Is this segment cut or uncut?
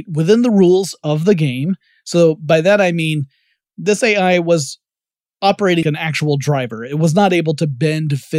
cut